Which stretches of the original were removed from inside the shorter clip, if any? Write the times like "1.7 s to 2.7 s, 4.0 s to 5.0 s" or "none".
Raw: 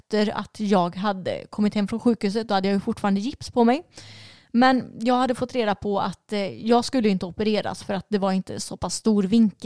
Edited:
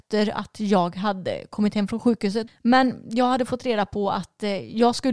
2.5 s to 4.4 s